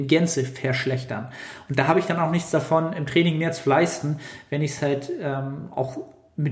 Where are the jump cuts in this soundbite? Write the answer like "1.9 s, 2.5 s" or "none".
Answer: none